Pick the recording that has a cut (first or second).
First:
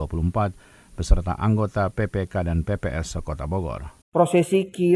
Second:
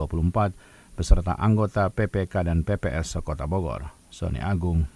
first